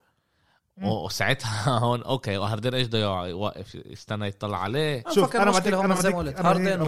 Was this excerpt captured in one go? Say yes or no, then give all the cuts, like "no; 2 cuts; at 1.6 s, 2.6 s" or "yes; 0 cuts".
yes; 0 cuts